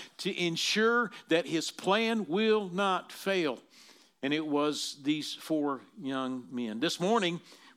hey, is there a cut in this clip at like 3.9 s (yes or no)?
no